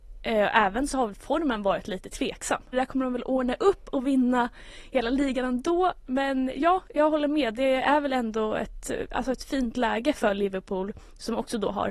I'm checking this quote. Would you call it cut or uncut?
cut